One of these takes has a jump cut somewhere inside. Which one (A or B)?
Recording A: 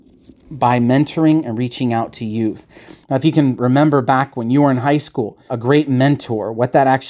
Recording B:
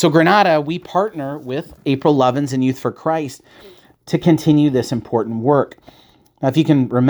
A